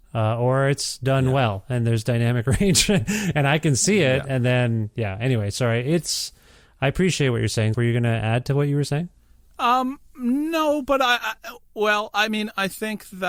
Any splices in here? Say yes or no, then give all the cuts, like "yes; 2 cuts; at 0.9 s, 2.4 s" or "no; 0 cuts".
yes; 1 cut; at 7.7 s